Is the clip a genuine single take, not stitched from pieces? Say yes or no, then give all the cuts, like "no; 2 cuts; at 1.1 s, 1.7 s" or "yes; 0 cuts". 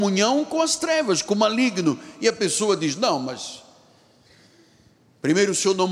yes; 0 cuts